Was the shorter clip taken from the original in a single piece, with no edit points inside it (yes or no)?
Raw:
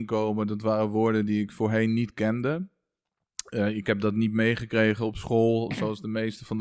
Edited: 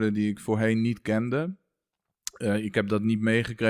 yes